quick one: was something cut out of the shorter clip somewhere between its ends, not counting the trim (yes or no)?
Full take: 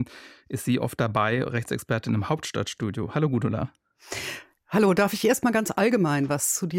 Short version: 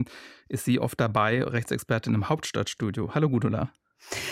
no